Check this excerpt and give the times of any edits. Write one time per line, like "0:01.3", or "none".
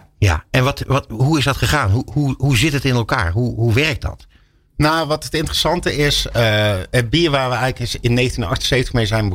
none